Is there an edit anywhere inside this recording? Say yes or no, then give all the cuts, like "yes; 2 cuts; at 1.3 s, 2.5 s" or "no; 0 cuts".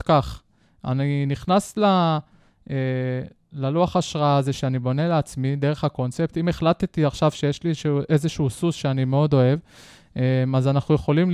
no; 0 cuts